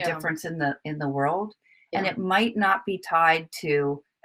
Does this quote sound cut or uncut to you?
uncut